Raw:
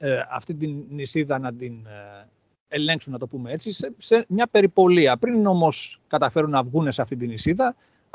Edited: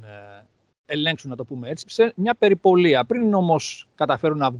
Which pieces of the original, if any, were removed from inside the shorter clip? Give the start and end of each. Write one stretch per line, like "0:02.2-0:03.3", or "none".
0:03.7-0:04.0